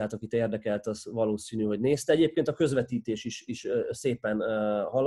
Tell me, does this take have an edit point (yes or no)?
no